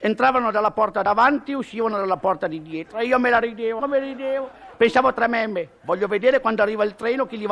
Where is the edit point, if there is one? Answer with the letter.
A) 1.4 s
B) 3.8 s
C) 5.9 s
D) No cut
B